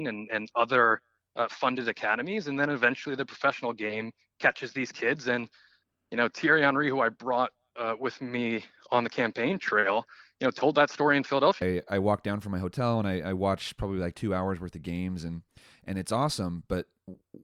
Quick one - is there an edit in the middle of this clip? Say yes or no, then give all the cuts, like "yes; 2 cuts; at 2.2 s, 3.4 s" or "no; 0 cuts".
yes; 1 cut; at 11.6 s